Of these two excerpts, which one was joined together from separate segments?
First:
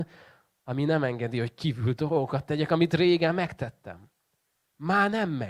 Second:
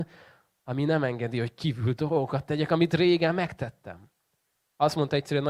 second; 1 cut; at 4.6 s

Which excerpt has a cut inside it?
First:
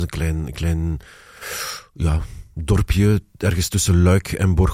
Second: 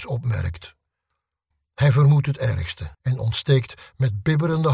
second; 1 cut; at 2.9 s

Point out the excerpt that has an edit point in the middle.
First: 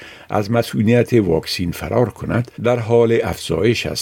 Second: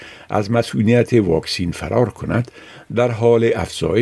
first; 1 cut; at 2.5 s

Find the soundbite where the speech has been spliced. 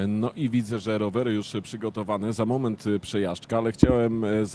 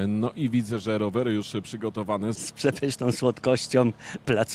second; 1 cut; at 2.3 s

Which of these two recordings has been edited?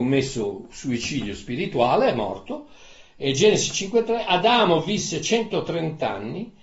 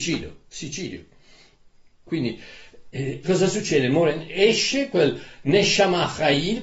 second; 2 cuts; at 2.1 s, 3.2 s

